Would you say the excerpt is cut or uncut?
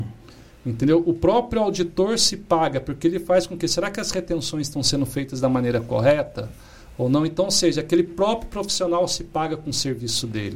uncut